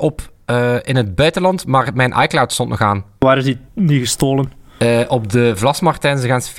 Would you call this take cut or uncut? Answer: cut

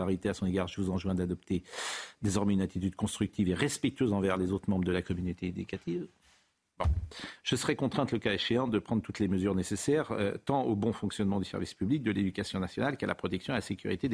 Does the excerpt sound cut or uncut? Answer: uncut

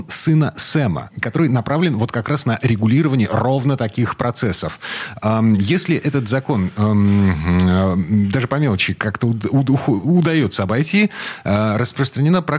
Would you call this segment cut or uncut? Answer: uncut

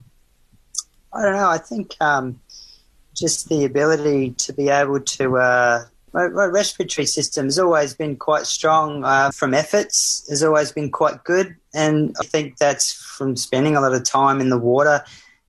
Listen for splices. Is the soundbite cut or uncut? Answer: cut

